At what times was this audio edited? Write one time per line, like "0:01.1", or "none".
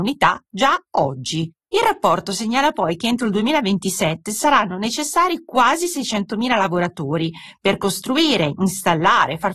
0:01.7